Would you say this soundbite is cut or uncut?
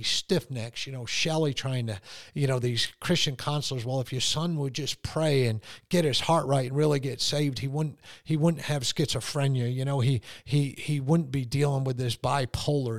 uncut